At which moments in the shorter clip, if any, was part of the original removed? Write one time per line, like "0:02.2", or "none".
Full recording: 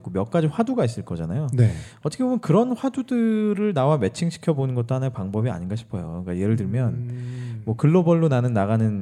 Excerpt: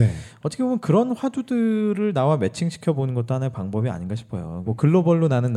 0:04.6